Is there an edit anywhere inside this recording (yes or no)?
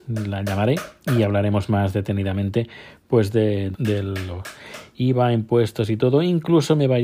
yes